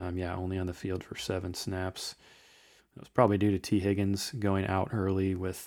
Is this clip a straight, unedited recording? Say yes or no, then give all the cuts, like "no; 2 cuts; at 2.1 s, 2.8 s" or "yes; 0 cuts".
no; 1 cut; at 2.8 s